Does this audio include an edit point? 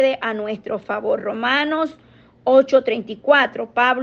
no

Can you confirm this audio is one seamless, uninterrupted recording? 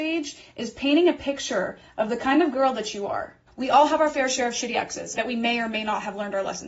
no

